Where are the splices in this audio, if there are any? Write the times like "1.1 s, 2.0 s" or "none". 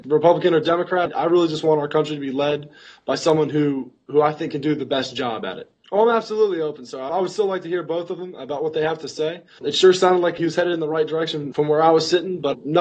5.8 s, 9.6 s